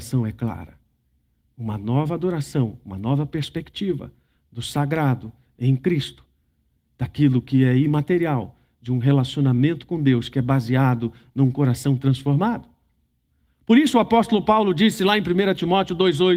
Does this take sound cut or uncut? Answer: uncut